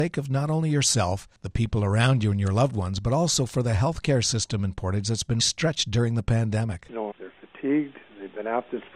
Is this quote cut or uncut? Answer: cut